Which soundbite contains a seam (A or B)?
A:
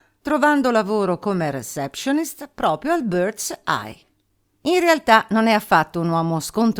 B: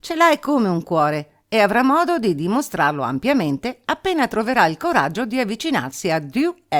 A